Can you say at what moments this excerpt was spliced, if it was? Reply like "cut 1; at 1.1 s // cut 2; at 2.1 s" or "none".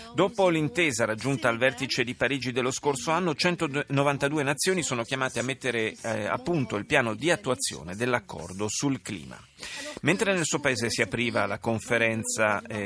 none